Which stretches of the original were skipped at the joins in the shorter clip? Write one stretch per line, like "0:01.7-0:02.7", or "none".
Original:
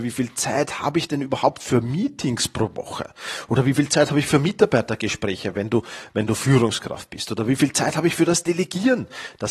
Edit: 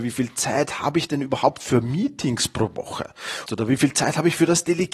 0:03.5-0:07.3